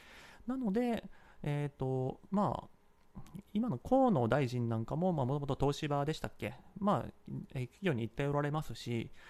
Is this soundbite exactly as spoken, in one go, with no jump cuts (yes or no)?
yes